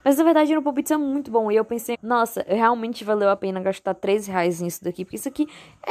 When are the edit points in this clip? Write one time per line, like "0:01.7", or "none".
0:01.9